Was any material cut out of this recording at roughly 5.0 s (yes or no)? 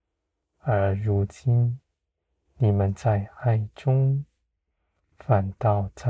yes